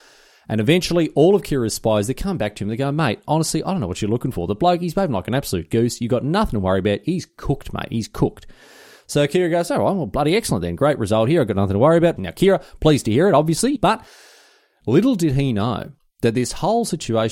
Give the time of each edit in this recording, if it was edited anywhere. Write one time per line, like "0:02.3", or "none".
0:12.2
0:13.8